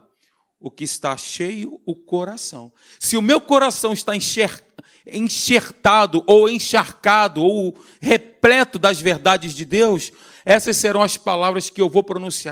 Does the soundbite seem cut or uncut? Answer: uncut